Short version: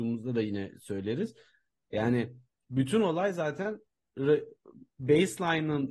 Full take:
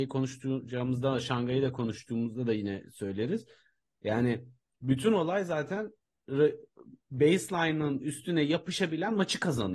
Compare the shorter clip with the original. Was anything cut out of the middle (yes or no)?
no